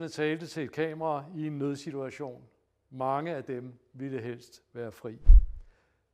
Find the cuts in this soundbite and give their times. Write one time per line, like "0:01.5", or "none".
none